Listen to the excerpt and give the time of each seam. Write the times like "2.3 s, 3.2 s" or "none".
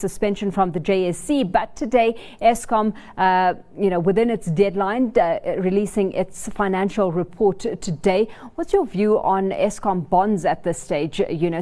none